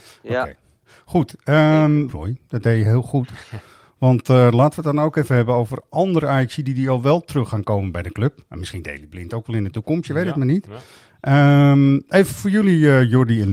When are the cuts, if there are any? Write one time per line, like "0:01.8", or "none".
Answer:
0:02.1